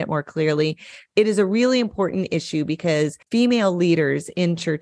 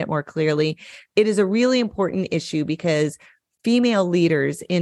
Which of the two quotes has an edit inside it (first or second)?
first